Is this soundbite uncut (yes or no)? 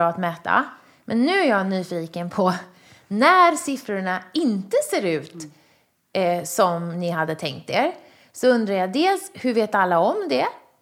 yes